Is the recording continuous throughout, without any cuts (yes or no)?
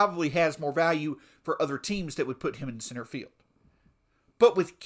yes